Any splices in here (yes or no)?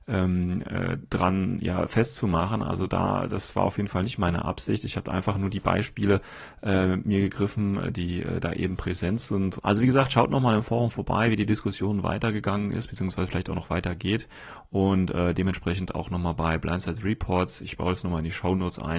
yes